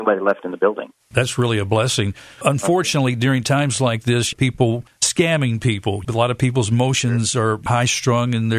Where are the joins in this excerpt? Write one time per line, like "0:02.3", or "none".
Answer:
none